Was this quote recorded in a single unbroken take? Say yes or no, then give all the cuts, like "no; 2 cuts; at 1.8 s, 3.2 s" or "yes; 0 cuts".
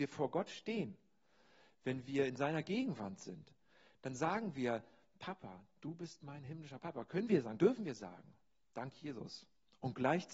yes; 0 cuts